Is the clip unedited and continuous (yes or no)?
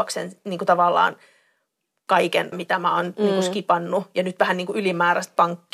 no